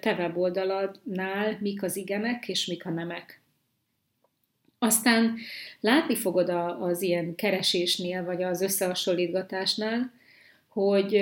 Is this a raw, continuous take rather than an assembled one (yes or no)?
yes